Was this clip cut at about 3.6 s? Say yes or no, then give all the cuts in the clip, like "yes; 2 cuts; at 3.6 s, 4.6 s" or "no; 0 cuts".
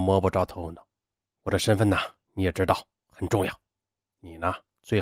no; 1 cut; at 1.3 s